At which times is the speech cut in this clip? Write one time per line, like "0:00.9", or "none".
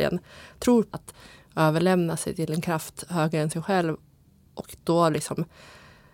0:00.9